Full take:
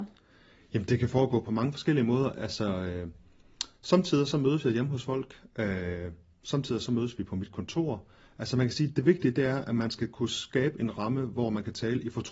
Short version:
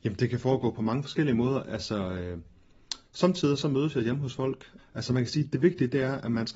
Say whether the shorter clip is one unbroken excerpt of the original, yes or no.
no